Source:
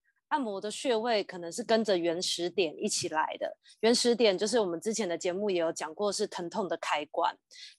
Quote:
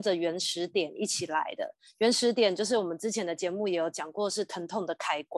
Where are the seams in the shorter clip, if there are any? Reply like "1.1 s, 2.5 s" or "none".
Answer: none